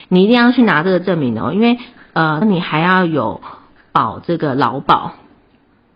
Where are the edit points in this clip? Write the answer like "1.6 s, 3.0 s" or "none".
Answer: 2.4 s